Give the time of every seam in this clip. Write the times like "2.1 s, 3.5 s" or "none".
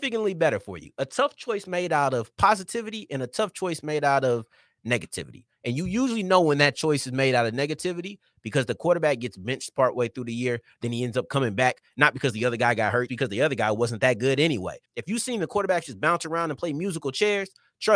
13.1 s, 14.8 s